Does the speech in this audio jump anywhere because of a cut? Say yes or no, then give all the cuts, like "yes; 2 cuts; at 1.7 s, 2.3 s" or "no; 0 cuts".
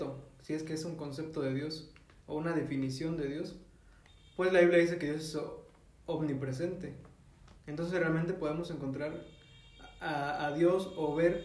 no; 0 cuts